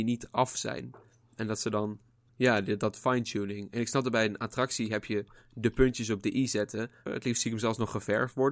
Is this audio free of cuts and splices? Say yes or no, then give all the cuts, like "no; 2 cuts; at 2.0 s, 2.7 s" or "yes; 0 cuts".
no; 2 cuts; at 2.3 s, 7.1 s